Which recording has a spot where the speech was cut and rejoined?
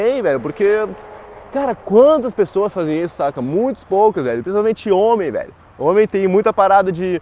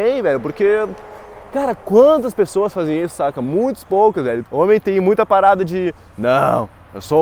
second; 1 cut; at 4.4 s

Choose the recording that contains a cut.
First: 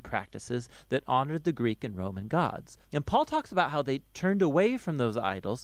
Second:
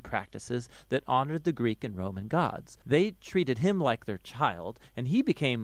second; 1 cut; at 2.8 s

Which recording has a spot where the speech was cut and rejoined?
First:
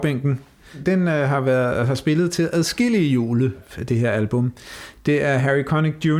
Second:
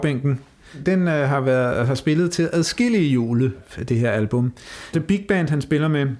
second; 1 cut; at 4.9 s

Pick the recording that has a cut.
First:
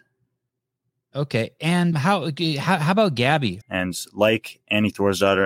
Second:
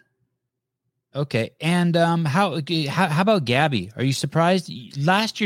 first; 2 cuts; at 1.9 s, 3.6 s

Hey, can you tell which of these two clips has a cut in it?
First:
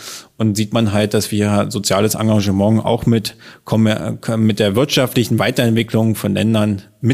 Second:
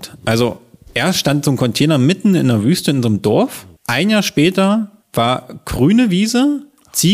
second; 2 cuts; at 3.8 s, 5.0 s

